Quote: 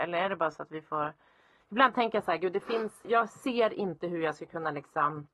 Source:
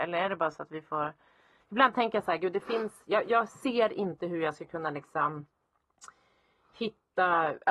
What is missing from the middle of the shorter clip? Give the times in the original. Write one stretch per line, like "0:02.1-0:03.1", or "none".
0:03.0-0:03.2